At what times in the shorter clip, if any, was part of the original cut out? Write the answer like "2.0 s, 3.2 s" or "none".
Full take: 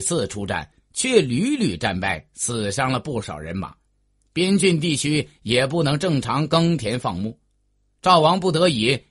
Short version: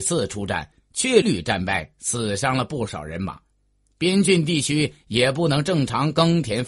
1.2 s